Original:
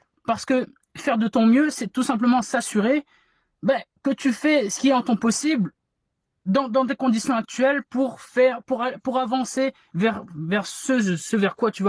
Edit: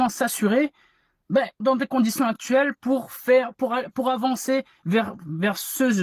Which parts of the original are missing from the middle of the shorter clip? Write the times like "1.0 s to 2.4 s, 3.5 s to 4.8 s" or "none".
3.9 s to 6.7 s

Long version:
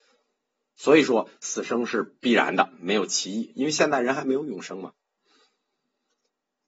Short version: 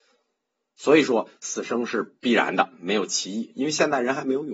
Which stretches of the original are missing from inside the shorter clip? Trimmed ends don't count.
none

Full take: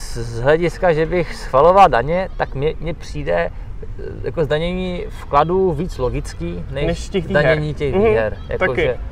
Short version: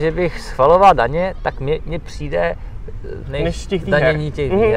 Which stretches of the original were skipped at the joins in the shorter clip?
4.2 s to 6.7 s

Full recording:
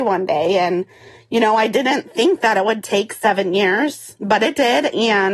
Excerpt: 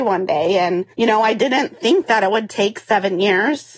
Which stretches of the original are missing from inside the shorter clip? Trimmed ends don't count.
0.9 s to 1.2 s

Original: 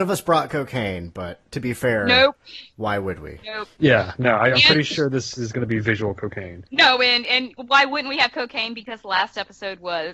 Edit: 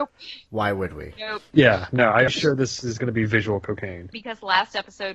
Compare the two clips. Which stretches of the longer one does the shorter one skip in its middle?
4.5 s to 4.8 s, 6.7 s to 8.8 s

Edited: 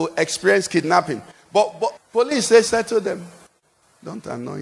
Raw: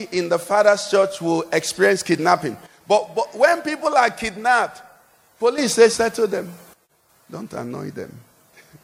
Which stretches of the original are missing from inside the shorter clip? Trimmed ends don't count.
3.3 s to 5.2 s

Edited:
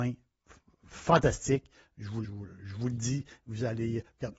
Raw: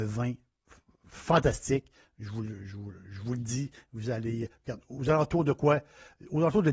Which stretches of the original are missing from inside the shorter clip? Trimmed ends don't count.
2.5 s to 2.7 s

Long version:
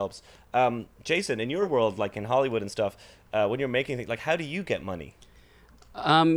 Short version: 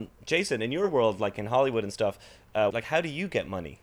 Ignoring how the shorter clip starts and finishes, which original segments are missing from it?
3.5 s to 4.1 s

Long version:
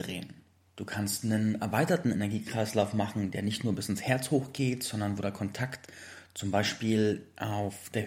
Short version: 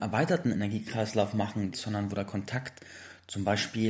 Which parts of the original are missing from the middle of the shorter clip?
3.3 s to 4.8 s

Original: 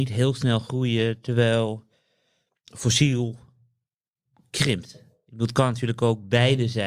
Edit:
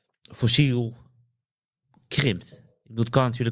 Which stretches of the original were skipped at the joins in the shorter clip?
none

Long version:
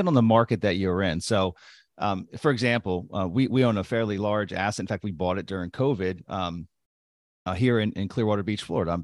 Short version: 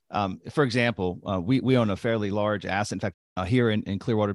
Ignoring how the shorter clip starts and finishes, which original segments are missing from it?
5.0 s to 7.2 s

